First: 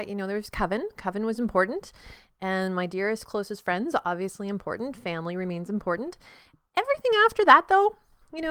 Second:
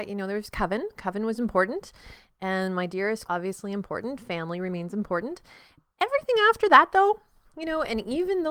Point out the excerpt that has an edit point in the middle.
second; 1 cut; at 3.3 s

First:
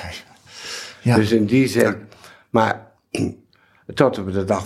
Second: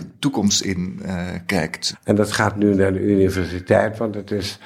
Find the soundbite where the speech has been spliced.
second; 1 cut; at 1.9 s

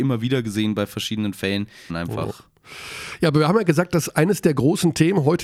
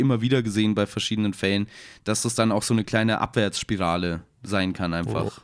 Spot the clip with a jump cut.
first; 1 cut; at 1.9 s

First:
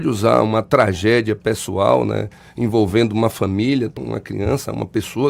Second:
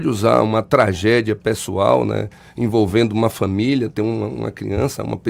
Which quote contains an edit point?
first; 1 cut; at 4.0 s

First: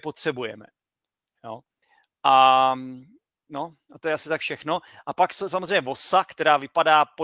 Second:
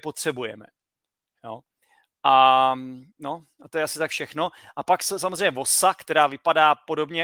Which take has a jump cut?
second; 1 cut; at 3.1 s

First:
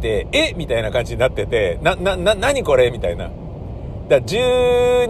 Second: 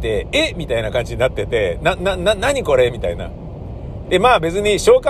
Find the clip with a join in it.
second; 1 cut; at 4.0 s

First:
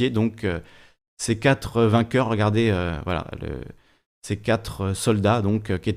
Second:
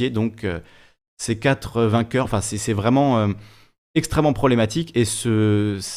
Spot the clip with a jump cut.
second; 1 cut; at 2.2 s

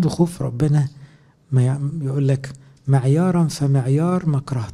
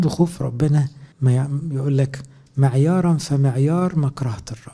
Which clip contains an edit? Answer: second; 1 cut; at 1.1 s

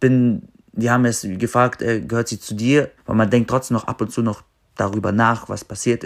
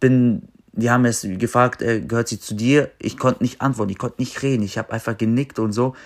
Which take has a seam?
first; 1 cut; at 3.0 s

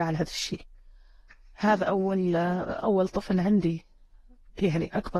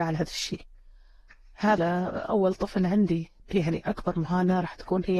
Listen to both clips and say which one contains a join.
second; 2 cuts; at 1.8 s, 3.4 s

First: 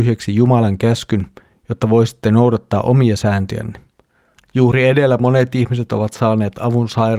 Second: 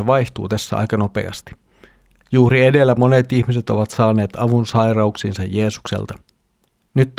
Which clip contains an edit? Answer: first; 1 cut; at 4.4 s

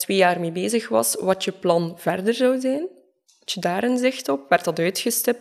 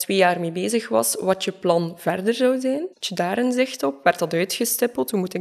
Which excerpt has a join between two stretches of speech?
second; 1 cut; at 2.9 s

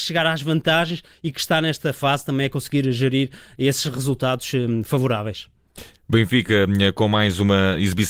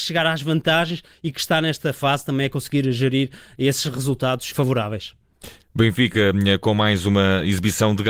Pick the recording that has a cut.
second; 1 cut; at 4.5 s

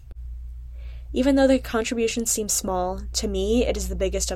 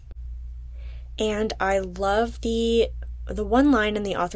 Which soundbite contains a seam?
first; 1 cut; at 1.1 s

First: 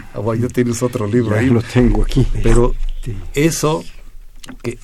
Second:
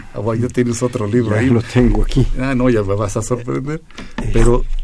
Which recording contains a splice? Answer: first; 1 cut; at 2.3 s

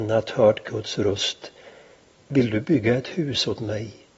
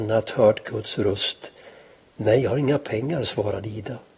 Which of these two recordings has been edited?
second; 1 cut; at 2.1 s

